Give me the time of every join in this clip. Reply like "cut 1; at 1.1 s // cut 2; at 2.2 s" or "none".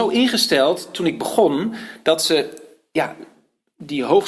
none